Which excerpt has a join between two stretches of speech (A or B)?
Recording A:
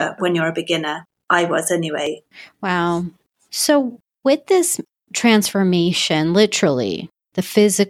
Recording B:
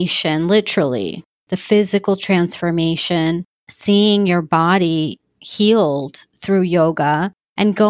A